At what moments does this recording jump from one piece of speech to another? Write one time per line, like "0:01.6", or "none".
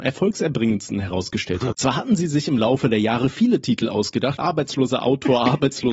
0:01.7
0:04.4